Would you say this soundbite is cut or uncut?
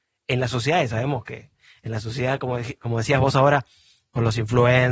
uncut